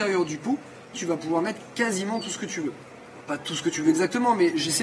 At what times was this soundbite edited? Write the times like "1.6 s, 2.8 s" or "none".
0.9 s